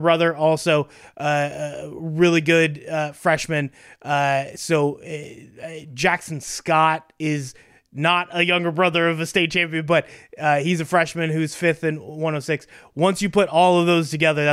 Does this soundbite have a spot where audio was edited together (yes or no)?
no